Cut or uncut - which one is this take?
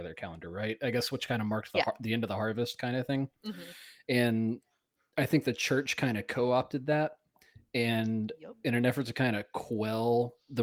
uncut